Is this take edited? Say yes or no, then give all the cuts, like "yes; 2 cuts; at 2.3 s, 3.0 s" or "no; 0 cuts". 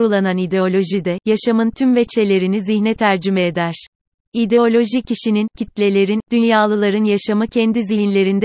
yes; 2 cuts; at 4.3 s, 6.2 s